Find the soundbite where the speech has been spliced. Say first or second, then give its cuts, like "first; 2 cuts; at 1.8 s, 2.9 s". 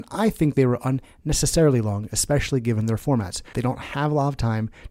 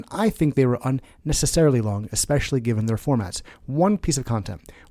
first; 1 cut; at 3.5 s